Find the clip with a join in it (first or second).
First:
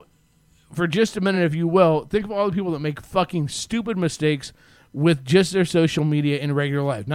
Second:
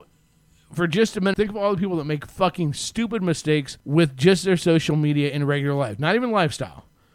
second